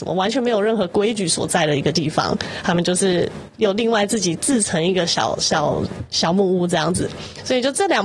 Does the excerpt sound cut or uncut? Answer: uncut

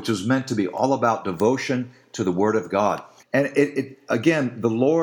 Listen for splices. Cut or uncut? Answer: cut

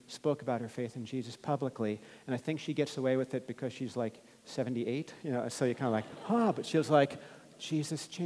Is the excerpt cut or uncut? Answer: uncut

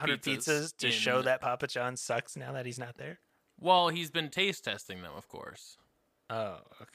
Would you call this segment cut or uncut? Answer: uncut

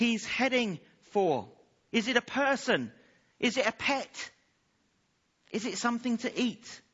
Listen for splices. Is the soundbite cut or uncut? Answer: cut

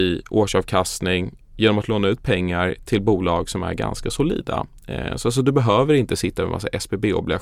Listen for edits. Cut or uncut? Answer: uncut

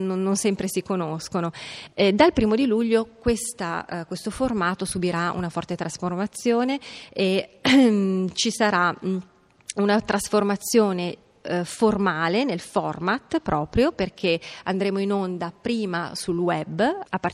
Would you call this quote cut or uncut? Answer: uncut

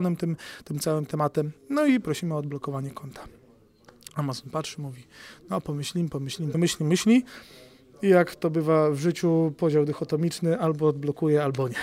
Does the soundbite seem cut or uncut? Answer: cut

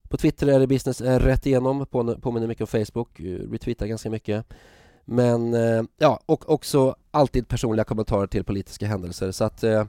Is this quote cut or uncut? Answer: uncut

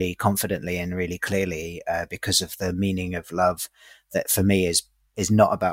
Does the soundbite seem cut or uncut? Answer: uncut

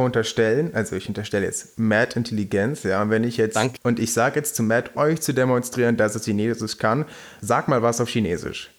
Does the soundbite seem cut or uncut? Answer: cut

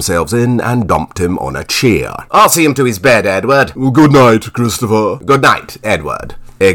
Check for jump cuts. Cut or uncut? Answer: uncut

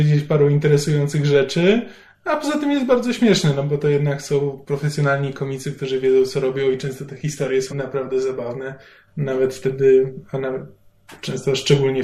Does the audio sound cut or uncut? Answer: cut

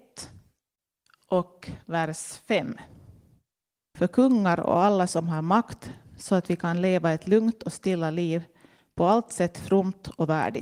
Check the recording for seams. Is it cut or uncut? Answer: cut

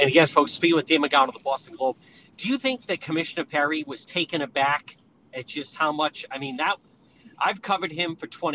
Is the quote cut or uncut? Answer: uncut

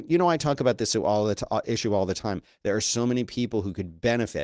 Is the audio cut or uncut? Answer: uncut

